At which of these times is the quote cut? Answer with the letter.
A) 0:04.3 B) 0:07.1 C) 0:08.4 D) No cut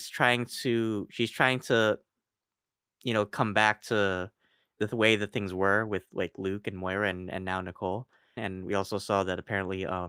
C